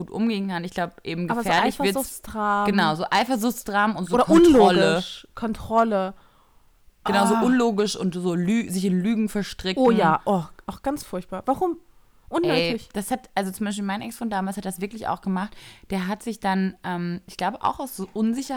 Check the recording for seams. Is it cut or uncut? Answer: uncut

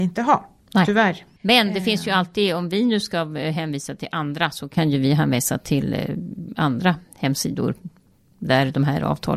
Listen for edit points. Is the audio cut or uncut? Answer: uncut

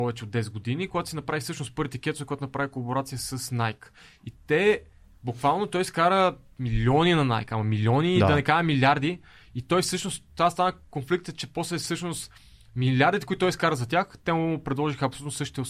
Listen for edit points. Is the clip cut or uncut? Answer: uncut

